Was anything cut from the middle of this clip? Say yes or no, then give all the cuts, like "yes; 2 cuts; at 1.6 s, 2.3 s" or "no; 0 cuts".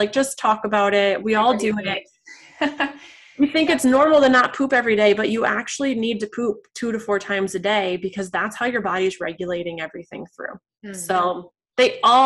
no; 0 cuts